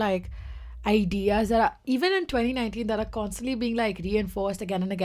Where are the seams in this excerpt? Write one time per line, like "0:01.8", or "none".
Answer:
none